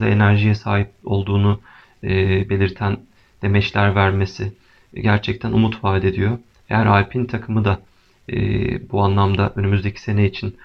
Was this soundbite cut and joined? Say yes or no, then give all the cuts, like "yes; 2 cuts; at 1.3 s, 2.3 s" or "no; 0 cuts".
no; 0 cuts